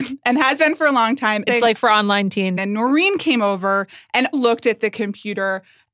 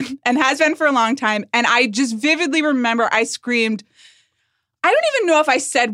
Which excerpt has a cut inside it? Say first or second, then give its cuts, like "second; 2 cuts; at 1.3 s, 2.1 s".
first; 3 cuts; at 1.5 s, 2.6 s, 4.3 s